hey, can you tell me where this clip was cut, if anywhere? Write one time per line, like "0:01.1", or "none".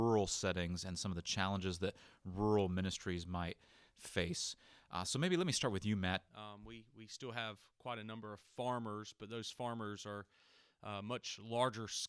0:06.3